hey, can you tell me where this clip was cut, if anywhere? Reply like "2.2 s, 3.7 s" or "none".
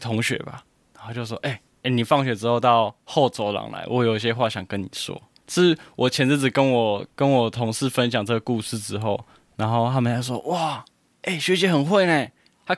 5.4 s